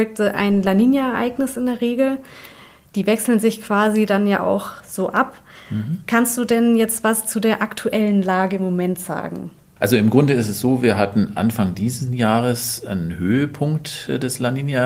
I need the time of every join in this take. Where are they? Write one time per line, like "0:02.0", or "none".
none